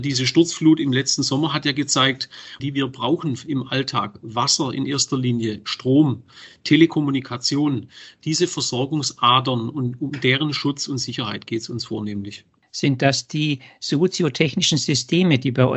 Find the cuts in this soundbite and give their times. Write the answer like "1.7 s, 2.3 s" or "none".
2.6 s